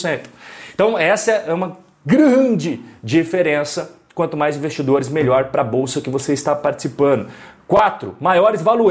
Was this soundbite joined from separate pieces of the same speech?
no; 0 cuts

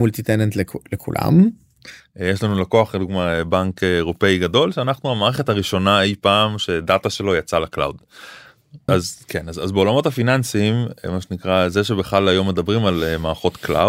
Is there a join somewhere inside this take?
yes; 2 cuts; at 2.0 s, 8.9 s

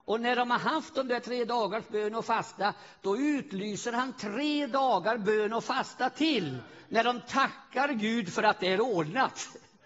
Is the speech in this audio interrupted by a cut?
no; 0 cuts

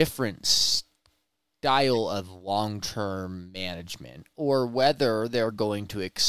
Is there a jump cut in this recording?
no; 0 cuts

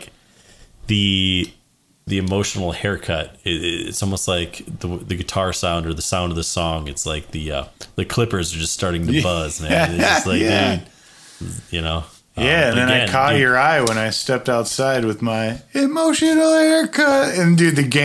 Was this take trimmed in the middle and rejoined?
no; 0 cuts

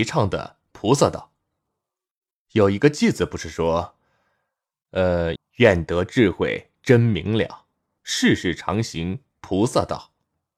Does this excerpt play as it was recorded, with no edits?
no; 2 cuts; at 5.4 s, 8.0 s

